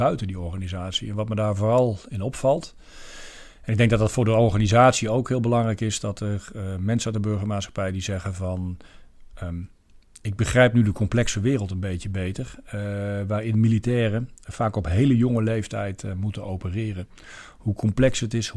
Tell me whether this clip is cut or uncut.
uncut